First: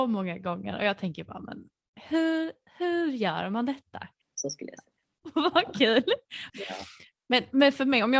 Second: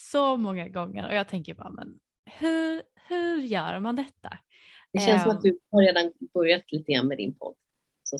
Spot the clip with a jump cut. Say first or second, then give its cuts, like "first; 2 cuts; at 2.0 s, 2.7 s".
first; 2 cuts; at 4.2 s, 6.5 s